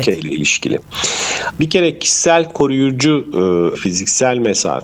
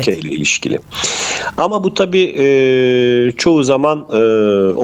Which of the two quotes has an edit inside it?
first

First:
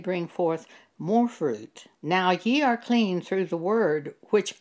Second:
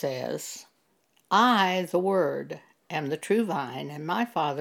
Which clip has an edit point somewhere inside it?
first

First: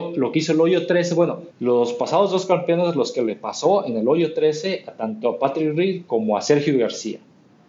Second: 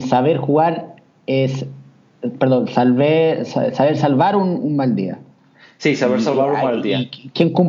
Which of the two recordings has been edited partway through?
first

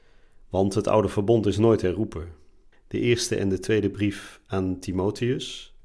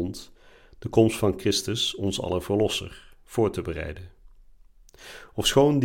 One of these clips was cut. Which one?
first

